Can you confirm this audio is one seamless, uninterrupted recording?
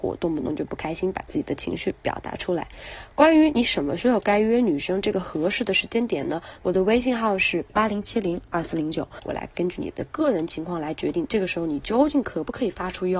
no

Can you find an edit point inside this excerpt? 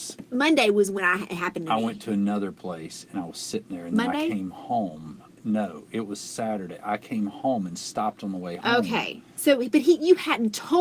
no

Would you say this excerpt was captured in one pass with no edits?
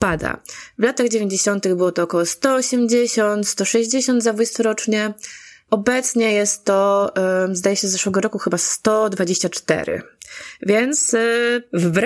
yes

